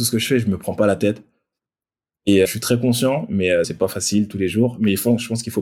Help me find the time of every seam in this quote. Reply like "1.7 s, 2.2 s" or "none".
2.5 s, 3.6 s